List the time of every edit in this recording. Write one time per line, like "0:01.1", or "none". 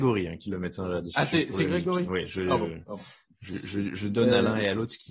none